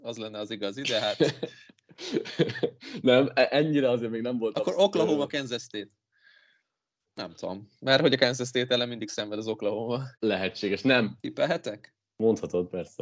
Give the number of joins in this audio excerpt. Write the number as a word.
three